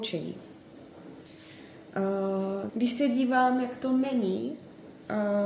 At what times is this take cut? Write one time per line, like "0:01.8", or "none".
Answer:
0:02.7